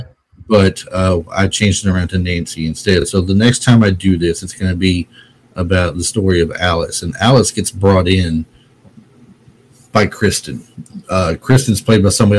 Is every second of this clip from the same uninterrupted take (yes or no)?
yes